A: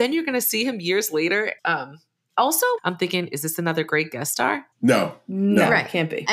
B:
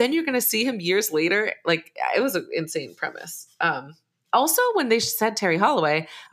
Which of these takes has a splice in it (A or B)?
A